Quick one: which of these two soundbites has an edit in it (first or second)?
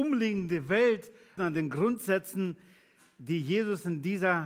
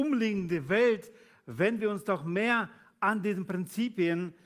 first